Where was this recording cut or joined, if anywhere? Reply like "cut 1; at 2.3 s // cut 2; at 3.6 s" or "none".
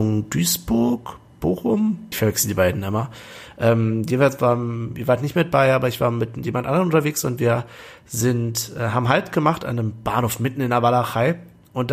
cut 1; at 2.1 s